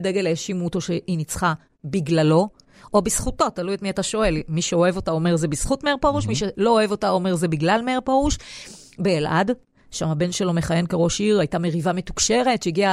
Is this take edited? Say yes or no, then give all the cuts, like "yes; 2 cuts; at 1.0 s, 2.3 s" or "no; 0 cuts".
no; 0 cuts